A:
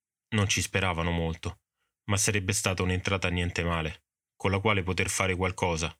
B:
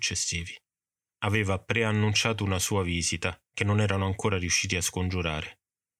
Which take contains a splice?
B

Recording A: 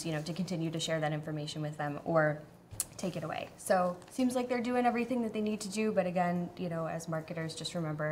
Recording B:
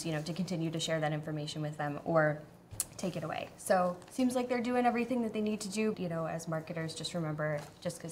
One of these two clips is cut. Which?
B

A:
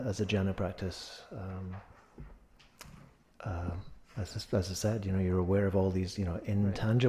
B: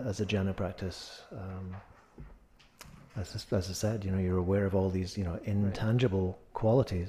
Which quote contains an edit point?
B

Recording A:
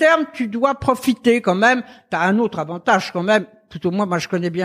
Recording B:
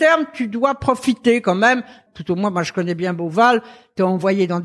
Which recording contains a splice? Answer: B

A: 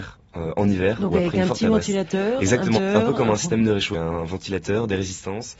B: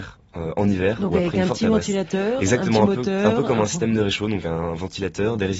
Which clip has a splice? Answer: A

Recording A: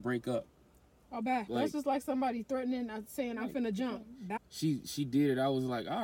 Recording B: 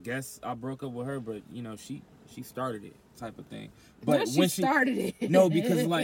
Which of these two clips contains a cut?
A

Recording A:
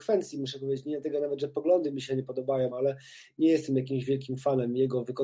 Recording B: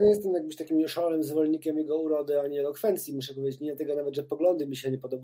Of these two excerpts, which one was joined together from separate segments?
A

